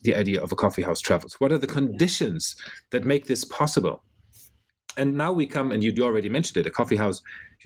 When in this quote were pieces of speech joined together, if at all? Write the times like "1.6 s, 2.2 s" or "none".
6.0 s